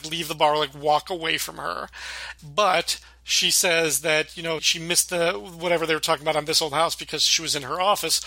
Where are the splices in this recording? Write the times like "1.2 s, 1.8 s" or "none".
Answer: 2.4 s, 4.6 s